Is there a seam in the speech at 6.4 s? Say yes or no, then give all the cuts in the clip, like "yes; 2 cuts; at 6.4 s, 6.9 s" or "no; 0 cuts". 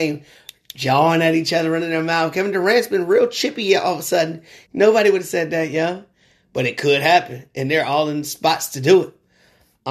no; 1 cut; at 4.7 s